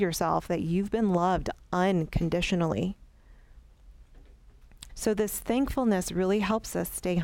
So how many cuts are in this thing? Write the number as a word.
one